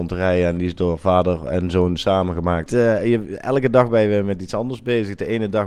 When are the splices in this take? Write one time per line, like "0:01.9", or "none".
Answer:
0:02.7